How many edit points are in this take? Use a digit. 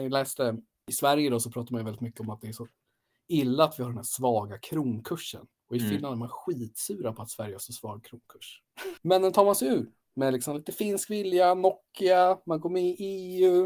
1